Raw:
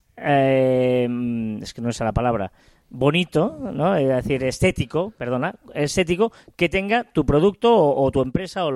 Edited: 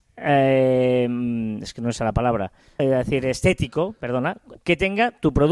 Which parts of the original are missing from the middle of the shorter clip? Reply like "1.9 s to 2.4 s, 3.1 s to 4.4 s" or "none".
2.8 s to 4.0 s, 5.7 s to 6.5 s